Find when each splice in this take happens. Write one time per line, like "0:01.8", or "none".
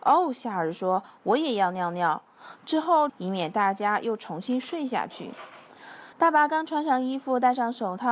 0:03.1
0:06.1